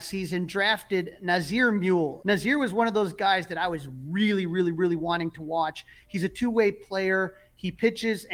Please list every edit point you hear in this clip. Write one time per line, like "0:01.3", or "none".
0:02.2